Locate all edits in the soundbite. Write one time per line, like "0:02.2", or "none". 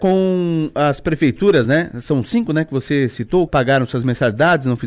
0:01.6
0:03.5